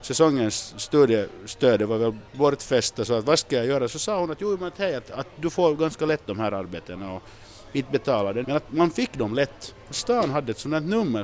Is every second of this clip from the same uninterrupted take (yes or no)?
no